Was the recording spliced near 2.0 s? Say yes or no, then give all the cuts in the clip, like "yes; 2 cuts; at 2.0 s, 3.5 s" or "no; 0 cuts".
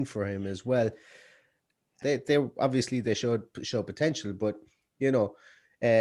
yes; 1 cut; at 2.0 s